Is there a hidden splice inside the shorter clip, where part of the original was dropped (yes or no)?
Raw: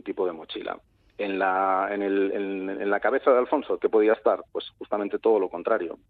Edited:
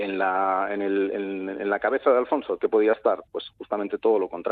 no